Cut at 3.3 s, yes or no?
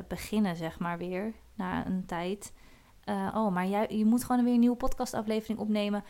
yes